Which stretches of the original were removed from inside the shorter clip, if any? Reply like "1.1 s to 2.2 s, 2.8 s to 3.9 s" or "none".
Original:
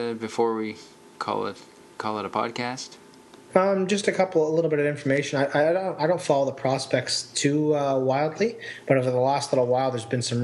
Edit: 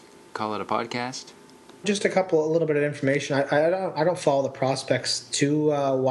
3.5 s to 3.9 s